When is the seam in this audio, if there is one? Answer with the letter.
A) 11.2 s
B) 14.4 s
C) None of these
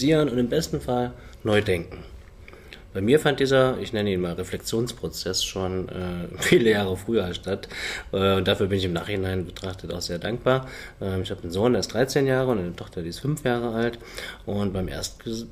C